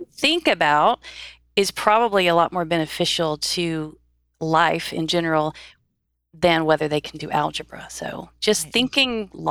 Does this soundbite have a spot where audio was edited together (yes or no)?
no